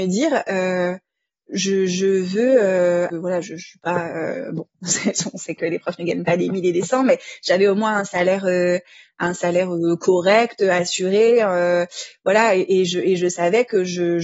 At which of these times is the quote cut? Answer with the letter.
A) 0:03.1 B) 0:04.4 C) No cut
A